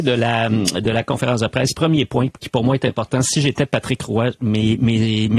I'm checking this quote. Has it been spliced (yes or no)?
no